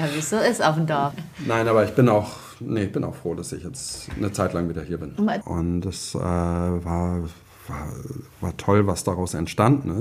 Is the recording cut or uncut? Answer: cut